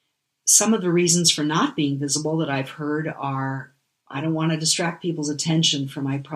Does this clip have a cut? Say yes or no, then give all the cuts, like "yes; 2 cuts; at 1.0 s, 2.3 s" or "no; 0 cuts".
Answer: no; 0 cuts